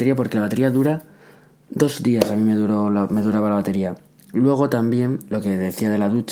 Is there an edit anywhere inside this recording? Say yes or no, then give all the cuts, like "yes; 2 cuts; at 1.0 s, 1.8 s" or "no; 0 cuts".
no; 0 cuts